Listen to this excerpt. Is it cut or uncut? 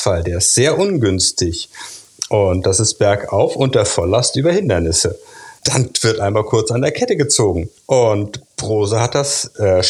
cut